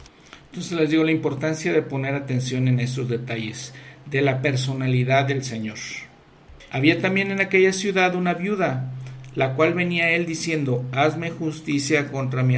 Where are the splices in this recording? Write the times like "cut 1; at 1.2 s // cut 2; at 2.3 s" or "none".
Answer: cut 1; at 6.7 s

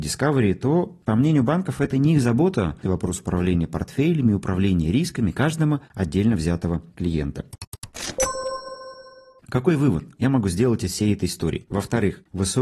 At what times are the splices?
cut 1; at 2.8 s // cut 2; at 11.7 s

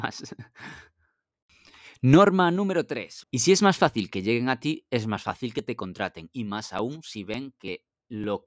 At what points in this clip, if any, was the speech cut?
cut 1; at 3.2 s

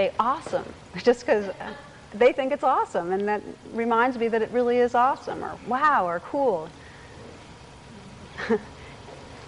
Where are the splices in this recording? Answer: cut 1; at 6.7 s

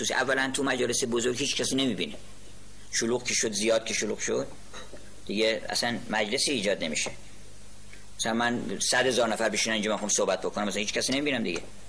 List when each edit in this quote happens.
cut 1; at 1.5 s

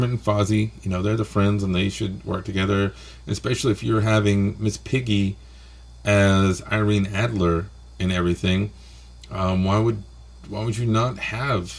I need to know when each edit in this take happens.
none

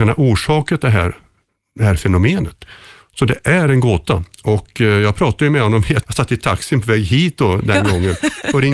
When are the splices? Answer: cut 1; at 6.0 s

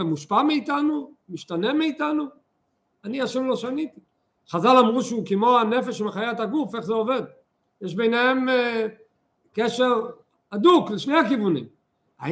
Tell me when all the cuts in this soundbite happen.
cut 1; at 4.3 s // cut 2; at 7.7 s

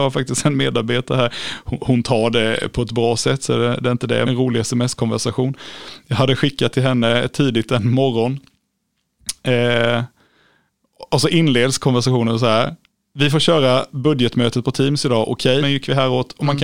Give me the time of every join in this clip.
cut 1; at 4.2 s // cut 2; at 15.6 s

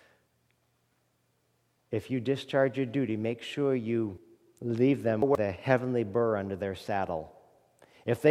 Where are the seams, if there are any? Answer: none

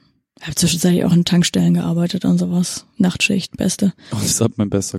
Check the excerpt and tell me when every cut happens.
none

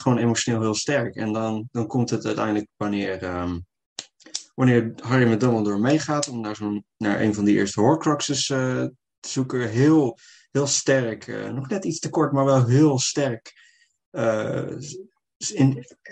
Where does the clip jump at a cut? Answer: cut 1; at 1.7 s

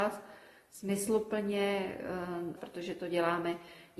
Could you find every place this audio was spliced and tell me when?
cut 1; at 2.6 s

